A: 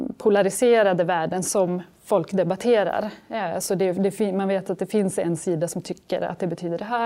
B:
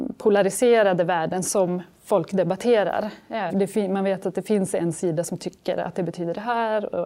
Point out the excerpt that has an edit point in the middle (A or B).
B